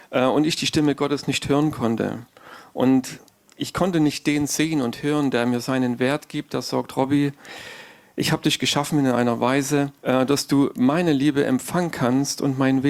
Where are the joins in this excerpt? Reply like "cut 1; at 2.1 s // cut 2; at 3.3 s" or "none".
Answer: cut 1; at 10.0 s